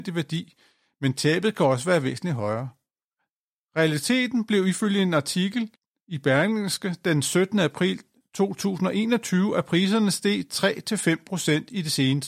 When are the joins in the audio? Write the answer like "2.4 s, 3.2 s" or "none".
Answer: none

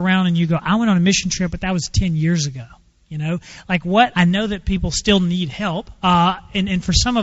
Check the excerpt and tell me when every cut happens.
4.1 s, 6.0 s

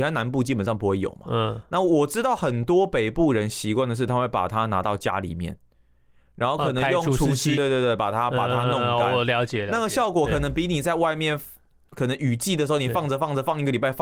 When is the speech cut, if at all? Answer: 7.6 s

